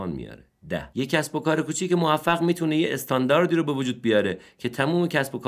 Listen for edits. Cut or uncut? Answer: cut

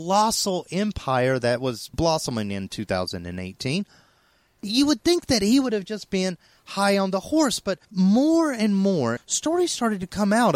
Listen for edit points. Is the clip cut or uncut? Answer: cut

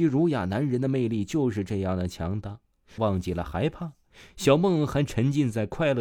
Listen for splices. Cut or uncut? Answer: cut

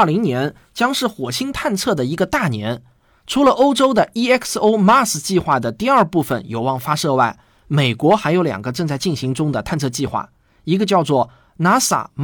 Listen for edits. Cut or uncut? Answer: uncut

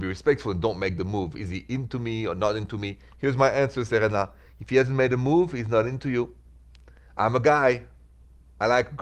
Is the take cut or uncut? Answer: uncut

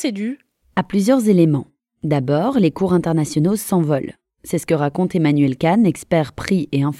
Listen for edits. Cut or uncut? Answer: uncut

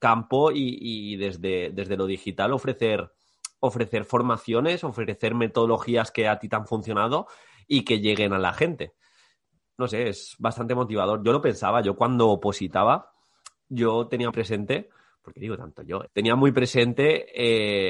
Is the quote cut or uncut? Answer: cut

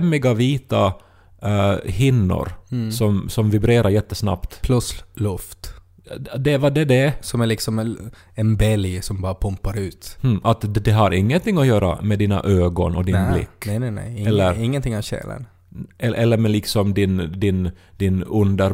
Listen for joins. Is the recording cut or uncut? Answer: uncut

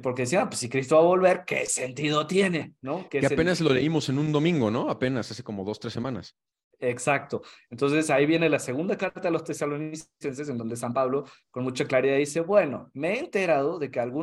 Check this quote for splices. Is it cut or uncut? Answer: uncut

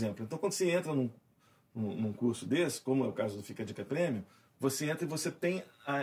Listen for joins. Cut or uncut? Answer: uncut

